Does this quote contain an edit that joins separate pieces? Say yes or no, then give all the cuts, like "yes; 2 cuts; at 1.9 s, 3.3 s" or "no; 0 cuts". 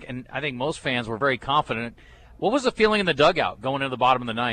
no; 0 cuts